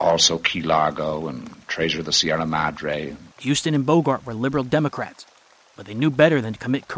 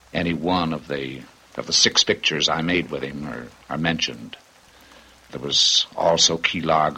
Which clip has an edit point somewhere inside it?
first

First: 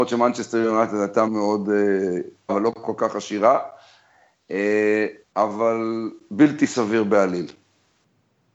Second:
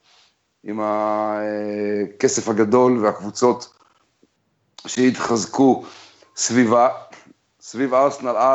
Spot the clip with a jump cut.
first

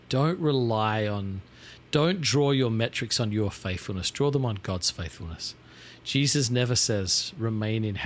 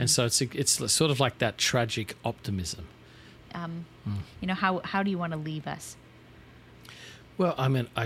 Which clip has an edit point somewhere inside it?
second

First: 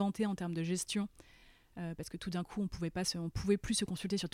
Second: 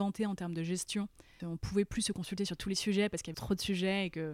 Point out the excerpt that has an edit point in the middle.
second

